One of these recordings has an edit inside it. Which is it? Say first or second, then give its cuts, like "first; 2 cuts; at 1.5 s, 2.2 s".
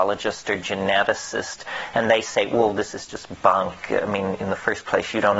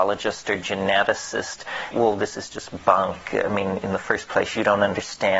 second; 1 cut; at 1.9 s